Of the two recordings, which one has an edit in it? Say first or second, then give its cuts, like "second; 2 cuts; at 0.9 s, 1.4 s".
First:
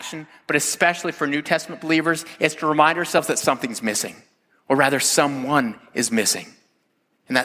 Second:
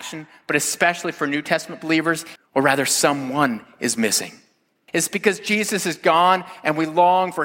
second; 2 cuts; at 2.4 s, 4.9 s